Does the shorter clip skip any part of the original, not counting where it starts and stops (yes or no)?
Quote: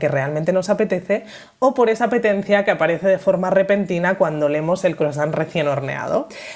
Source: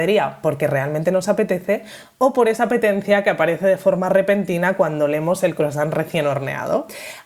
no